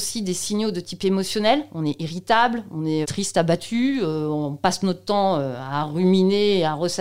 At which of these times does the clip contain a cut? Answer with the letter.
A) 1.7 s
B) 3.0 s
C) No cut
B